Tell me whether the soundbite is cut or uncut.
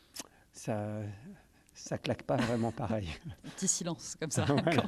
uncut